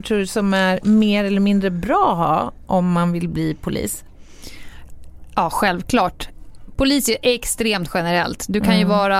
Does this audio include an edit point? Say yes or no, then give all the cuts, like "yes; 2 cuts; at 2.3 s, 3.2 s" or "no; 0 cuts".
no; 0 cuts